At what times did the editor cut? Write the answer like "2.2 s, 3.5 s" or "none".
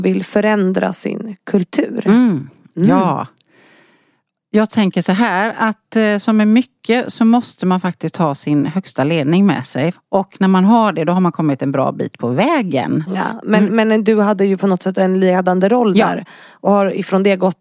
9.9 s, 13.1 s